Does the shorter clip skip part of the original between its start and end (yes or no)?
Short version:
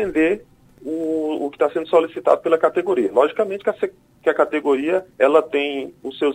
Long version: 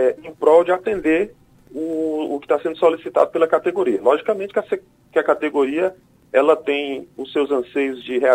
yes